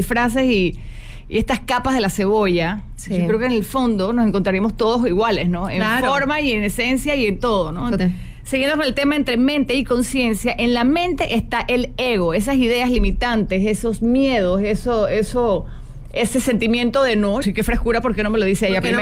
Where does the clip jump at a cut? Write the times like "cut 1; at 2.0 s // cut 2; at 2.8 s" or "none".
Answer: cut 1; at 8.0 s // cut 2; at 17.4 s